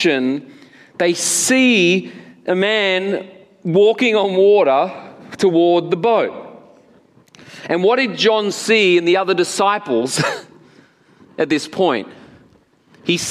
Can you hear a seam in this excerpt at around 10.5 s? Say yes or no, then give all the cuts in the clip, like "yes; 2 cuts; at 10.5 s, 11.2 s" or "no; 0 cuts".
no; 0 cuts